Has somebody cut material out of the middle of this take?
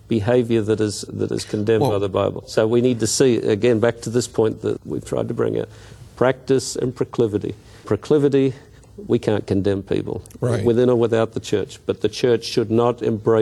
no; 0 cuts

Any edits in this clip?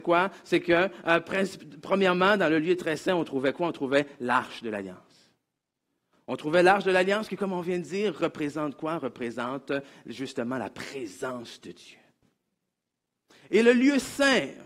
no; 0 cuts

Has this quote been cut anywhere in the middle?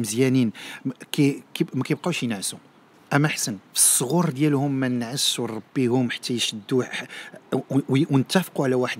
yes; 1 cut; at 3.7 s

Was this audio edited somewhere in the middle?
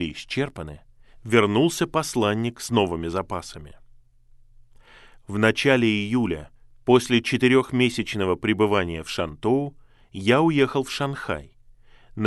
no; 0 cuts

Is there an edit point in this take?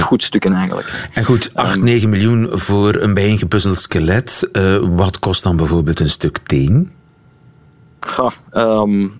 no; 0 cuts

